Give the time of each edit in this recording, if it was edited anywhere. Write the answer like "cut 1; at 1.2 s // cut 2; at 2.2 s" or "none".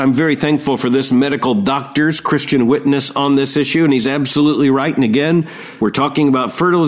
cut 1; at 5.8 s